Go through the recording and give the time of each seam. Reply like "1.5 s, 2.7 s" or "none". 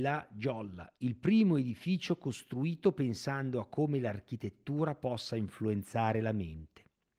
1.0 s